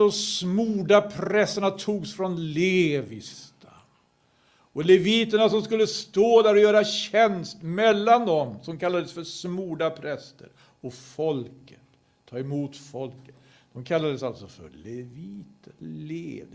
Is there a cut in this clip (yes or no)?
no